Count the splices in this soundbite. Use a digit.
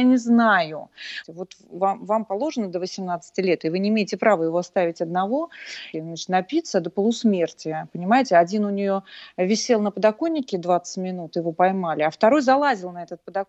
2